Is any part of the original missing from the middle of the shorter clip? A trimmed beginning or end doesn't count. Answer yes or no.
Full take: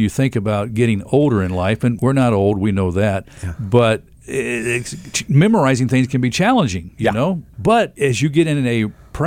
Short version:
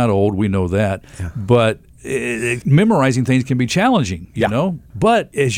yes